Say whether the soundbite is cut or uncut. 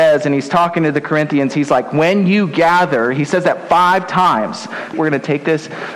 cut